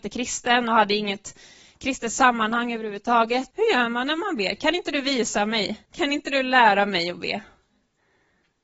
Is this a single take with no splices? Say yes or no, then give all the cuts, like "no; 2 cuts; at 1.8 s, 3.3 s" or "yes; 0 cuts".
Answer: no; 2 cuts; at 3.5 s, 5.9 s